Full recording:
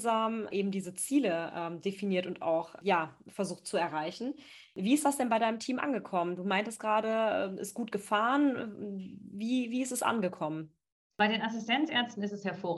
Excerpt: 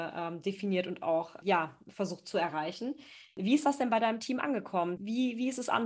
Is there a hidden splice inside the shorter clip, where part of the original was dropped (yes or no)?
yes